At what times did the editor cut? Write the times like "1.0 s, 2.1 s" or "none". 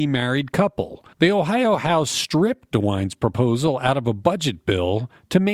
1.1 s